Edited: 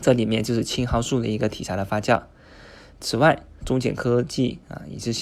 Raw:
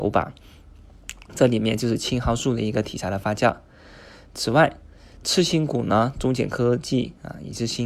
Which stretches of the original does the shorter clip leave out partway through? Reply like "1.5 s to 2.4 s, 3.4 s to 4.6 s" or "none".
4.9 s to 6.1 s

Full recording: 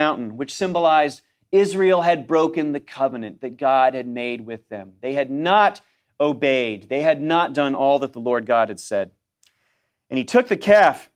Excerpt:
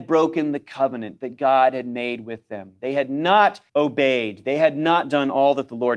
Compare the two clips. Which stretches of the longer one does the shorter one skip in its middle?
5.9 s to 6.1 s

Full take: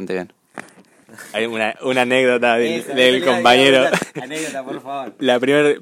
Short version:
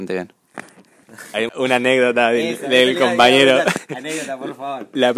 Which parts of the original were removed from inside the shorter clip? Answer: 1.5 s to 1.7 s

